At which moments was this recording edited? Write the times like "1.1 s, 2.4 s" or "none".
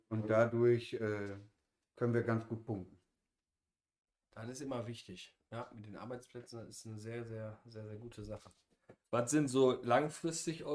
none